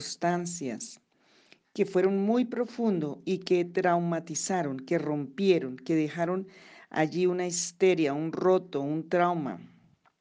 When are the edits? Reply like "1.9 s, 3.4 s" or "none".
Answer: none